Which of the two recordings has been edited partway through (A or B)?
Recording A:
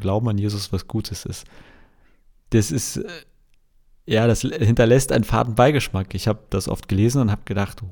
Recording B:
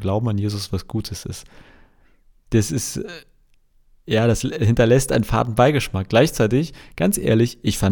A